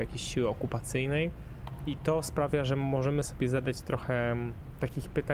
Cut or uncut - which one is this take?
uncut